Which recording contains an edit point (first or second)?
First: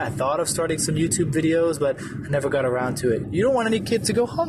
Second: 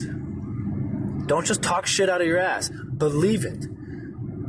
first